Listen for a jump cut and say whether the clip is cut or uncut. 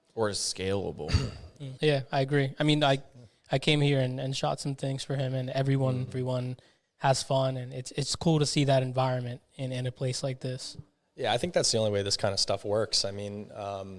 cut